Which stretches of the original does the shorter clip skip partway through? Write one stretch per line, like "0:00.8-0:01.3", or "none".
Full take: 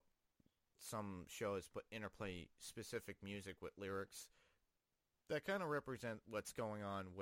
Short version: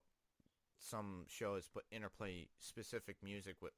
none